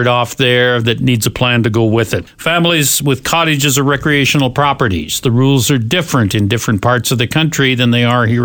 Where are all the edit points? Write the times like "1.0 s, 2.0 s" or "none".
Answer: none